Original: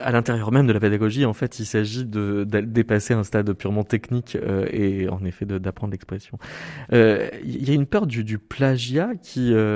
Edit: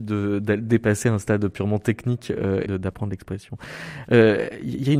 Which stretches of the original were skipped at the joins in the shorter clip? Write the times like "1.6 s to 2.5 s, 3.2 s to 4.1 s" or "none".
4.7 s to 5.5 s